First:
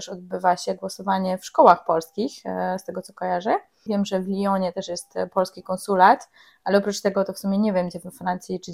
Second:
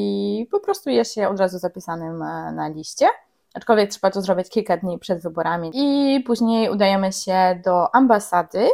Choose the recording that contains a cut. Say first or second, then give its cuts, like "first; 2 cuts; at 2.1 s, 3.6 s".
first; 1 cut; at 3.9 s